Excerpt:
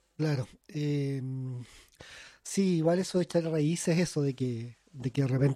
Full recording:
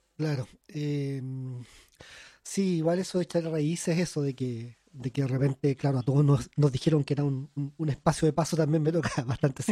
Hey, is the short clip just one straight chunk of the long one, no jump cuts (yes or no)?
yes